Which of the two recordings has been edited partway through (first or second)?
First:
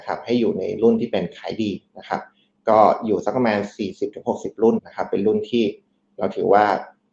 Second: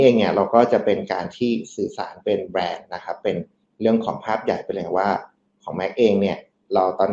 first